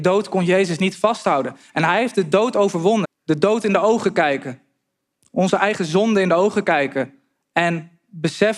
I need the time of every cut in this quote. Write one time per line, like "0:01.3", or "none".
0:03.0